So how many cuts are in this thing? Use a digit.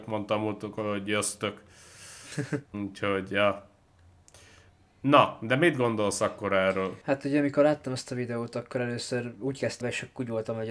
3